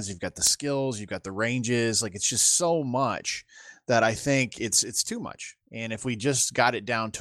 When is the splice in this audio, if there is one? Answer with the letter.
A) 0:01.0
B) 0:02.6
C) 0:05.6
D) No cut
D